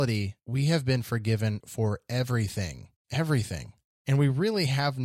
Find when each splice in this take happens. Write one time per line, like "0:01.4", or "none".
0:03.0